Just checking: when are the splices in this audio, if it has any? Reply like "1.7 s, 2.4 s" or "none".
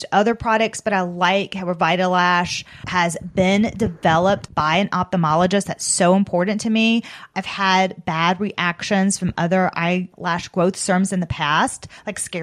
none